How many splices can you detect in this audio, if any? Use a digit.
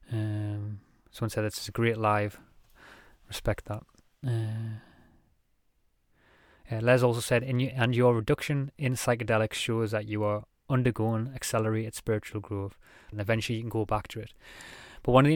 1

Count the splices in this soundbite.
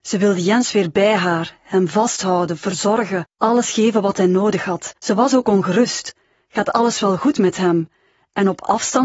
1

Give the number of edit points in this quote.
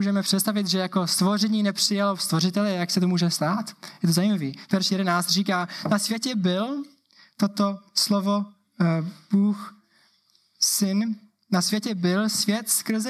0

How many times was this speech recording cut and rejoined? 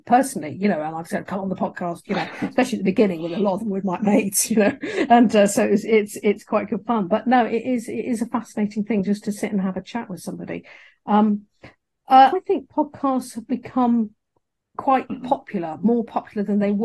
2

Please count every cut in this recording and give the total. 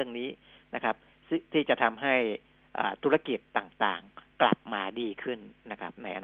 0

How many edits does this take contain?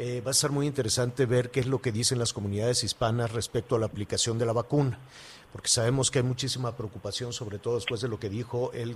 0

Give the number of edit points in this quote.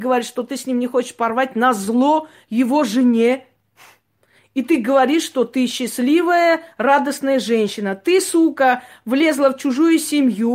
1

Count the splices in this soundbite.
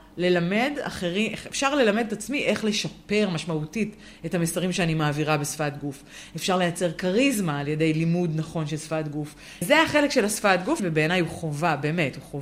2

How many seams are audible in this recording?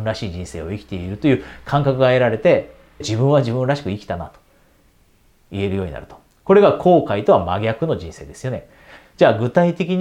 2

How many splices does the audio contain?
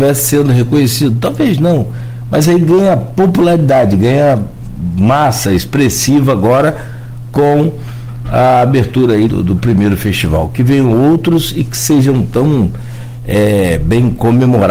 1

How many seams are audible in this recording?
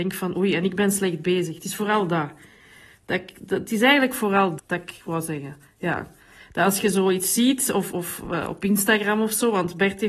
1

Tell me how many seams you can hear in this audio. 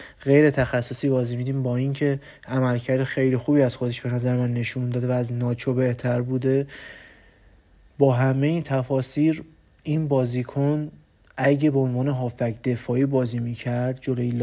0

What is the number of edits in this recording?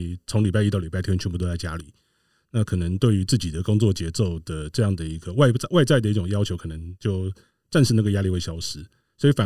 0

